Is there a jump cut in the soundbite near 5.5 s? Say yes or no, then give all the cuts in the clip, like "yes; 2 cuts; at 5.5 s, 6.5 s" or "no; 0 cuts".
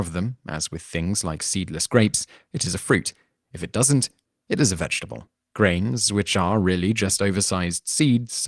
yes; 1 cut; at 5.5 s